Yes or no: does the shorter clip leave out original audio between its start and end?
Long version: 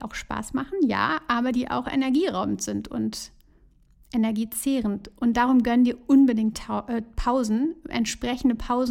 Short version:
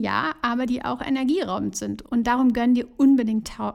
yes